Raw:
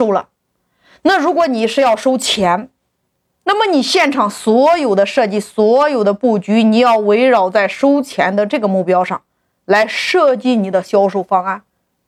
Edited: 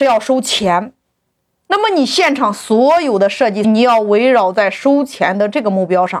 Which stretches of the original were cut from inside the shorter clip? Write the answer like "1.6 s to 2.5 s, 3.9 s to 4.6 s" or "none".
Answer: 5.4 s to 6.6 s